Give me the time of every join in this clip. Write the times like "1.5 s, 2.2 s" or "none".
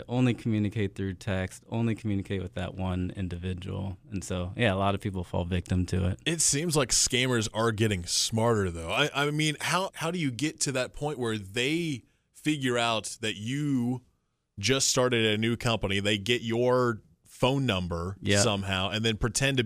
9.9 s

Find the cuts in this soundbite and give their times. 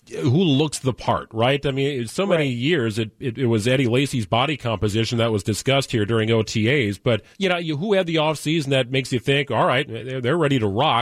7.3 s

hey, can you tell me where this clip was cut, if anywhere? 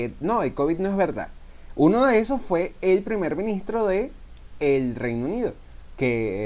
none

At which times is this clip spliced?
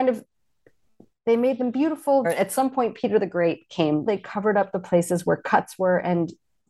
2.2 s, 4.1 s

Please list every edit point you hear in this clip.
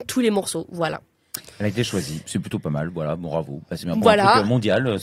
none

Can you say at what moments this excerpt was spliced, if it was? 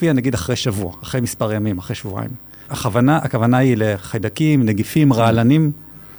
2.7 s

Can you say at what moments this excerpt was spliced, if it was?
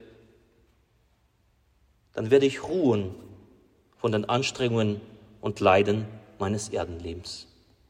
none

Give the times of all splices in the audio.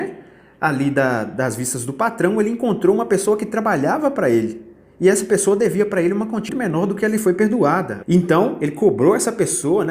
6.5 s, 8.0 s

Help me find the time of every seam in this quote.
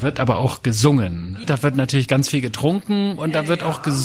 1.4 s

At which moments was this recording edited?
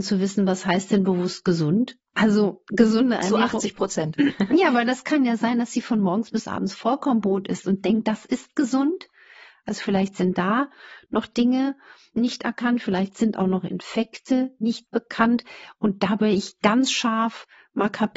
12.1 s, 14.6 s

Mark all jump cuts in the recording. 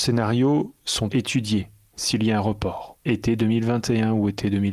1.1 s, 3.0 s

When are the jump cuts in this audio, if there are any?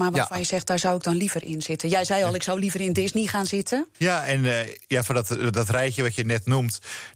3.9 s

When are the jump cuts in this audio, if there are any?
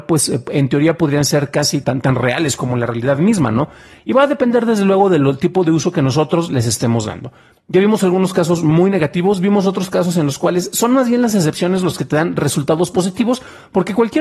1.8 s

